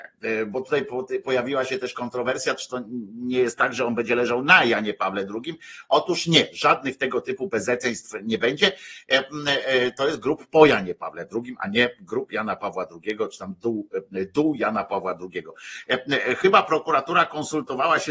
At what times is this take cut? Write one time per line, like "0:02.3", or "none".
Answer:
none